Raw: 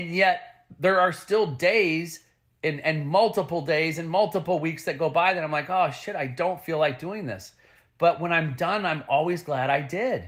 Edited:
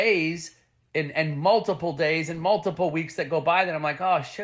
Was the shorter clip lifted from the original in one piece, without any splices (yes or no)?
yes